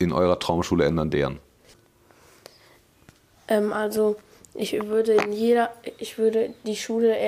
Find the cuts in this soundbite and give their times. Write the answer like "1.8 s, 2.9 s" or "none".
none